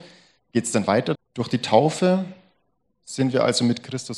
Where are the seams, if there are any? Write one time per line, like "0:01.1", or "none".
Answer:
0:01.1